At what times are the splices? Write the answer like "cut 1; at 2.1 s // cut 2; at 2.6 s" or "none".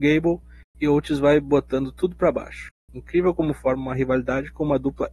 none